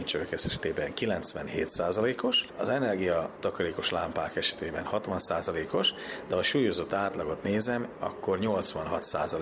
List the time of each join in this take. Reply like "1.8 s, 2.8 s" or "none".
none